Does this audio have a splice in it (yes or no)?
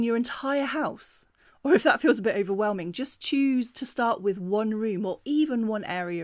no